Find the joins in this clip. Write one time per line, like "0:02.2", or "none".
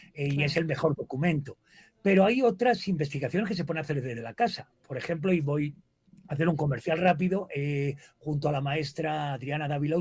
none